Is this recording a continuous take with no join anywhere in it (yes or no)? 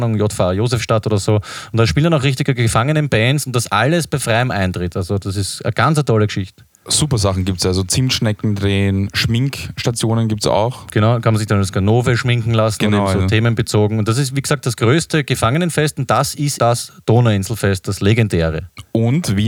no